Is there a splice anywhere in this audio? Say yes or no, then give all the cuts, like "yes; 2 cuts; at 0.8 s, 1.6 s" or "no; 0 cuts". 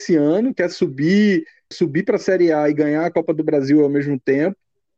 yes; 1 cut; at 1.7 s